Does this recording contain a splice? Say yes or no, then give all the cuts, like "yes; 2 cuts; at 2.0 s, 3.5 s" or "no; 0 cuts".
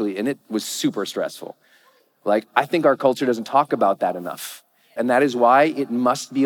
yes; 1 cut; at 5.0 s